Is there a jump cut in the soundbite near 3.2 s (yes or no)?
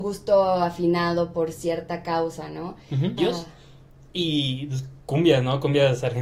yes